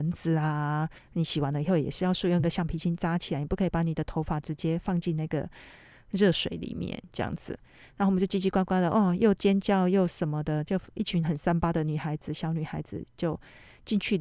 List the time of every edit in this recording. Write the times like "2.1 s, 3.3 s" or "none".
1.0 s